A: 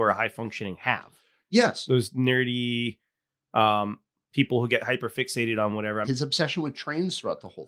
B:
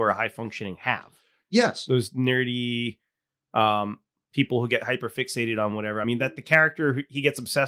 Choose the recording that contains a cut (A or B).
A